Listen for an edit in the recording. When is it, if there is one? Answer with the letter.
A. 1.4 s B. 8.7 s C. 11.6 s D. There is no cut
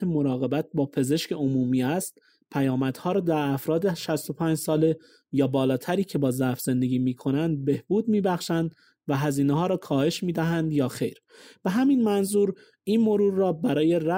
D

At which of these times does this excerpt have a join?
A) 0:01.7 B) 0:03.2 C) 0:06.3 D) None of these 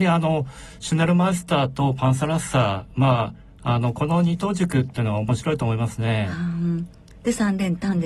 D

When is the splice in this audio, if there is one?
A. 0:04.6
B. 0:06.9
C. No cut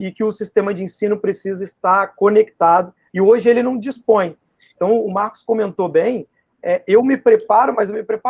C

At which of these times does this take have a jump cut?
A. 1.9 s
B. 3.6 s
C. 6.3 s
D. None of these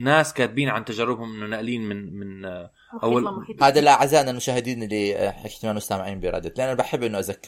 B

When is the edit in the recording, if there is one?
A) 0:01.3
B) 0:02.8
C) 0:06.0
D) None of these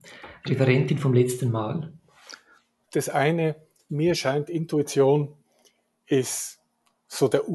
B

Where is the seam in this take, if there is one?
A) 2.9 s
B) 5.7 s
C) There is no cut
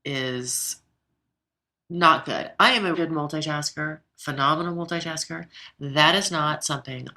A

